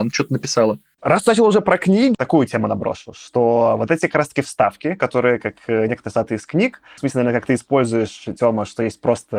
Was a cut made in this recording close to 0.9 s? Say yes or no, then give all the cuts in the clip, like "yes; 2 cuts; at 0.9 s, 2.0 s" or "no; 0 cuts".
no; 2 cuts; at 2.1 s, 7.0 s